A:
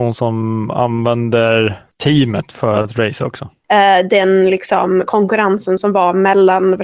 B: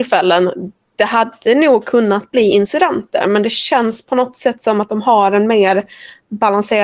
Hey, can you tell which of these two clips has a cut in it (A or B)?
A